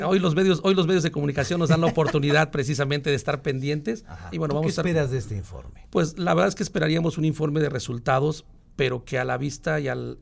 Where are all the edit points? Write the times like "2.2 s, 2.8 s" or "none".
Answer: 4.3 s